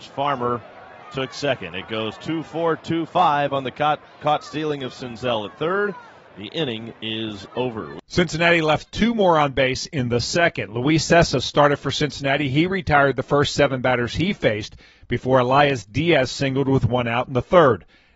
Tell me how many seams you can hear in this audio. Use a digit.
0